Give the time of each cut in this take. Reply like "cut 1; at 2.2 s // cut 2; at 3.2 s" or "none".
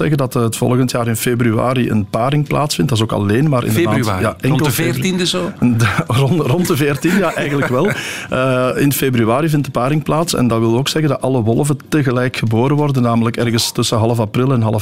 none